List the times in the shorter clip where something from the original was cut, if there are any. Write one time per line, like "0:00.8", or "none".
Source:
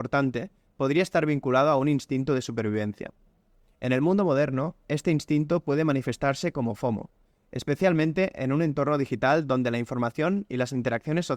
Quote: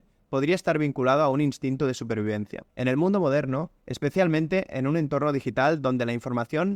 0:02.7
0:03.8